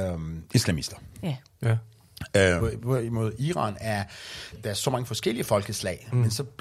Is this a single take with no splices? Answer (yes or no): no